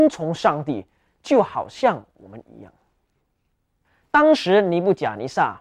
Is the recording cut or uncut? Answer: uncut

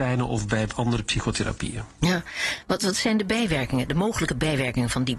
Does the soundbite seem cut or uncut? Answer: cut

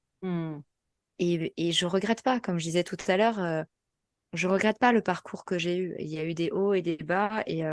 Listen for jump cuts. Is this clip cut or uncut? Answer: uncut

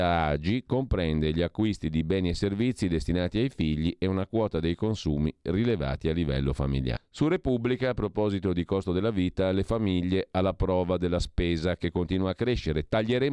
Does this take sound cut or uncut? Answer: cut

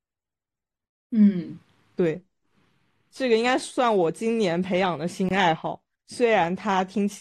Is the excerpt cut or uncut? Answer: uncut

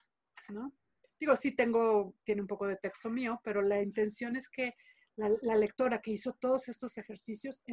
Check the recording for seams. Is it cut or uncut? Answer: cut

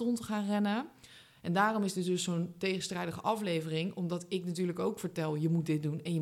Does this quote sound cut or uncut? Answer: cut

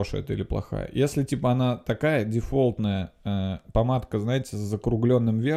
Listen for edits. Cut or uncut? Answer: uncut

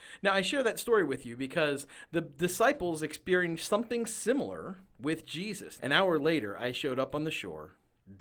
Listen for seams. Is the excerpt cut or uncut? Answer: cut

